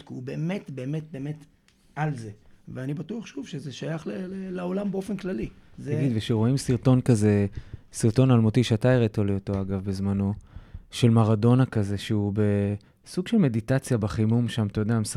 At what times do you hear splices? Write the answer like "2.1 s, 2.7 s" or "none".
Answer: none